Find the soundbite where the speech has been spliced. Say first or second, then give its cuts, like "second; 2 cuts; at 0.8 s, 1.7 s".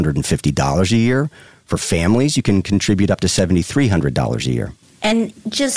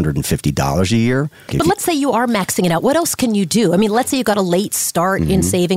second; 1 cut; at 1.5 s